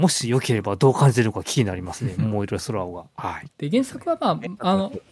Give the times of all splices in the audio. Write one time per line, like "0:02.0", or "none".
0:03.5